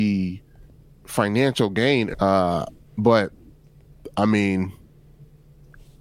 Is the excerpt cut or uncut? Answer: cut